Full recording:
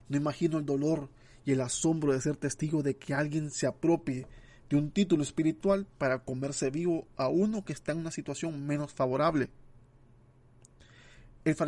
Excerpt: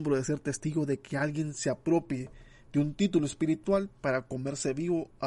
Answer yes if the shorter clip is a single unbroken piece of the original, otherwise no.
yes